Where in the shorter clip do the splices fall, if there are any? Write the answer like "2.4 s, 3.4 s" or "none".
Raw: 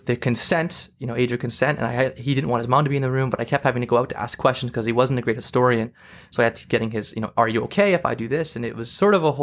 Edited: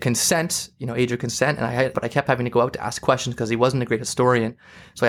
1.9 s